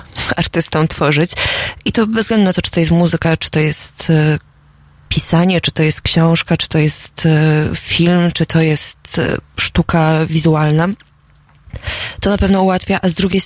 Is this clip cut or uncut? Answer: uncut